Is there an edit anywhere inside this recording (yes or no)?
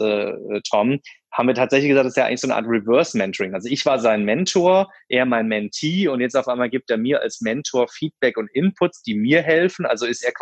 no